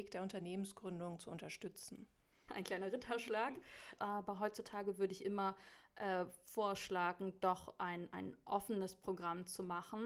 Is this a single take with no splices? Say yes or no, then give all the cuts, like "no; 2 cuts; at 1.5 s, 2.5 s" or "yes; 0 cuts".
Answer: no; 2 cuts; at 2.5 s, 4.0 s